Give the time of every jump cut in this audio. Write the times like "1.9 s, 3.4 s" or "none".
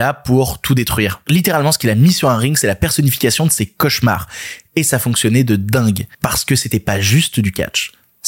none